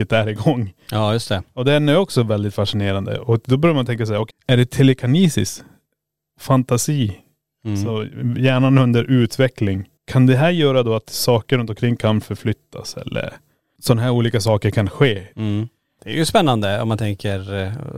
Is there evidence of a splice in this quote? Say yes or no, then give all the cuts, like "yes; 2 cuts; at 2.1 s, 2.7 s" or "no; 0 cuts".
yes; 3 cuts; at 4.3 s, 10.0 s, 15.3 s